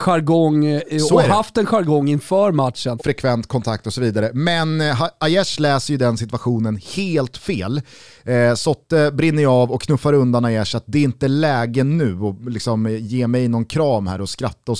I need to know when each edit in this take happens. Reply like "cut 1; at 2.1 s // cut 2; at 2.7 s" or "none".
cut 1; at 3.0 s